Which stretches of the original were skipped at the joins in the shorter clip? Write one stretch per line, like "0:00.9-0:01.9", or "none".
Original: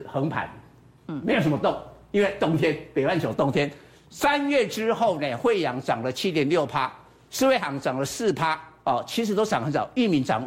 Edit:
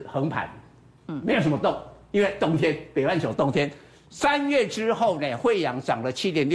none